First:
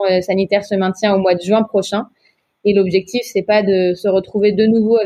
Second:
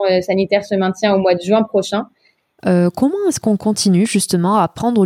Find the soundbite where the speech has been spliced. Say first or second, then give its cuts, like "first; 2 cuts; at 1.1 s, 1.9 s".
second; 1 cut; at 2.6 s